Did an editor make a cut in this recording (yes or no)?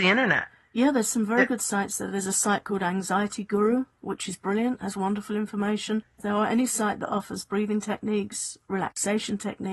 no